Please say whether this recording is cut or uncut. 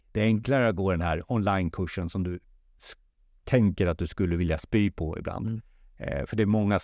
uncut